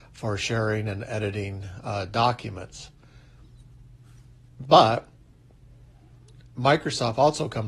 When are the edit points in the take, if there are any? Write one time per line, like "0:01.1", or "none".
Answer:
none